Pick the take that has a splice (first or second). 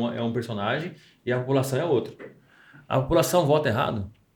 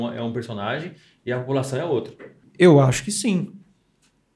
second